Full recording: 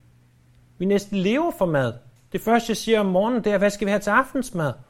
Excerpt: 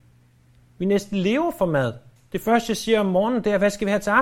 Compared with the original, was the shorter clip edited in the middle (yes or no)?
no